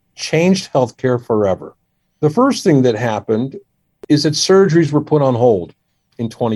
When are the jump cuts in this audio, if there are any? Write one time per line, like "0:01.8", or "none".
none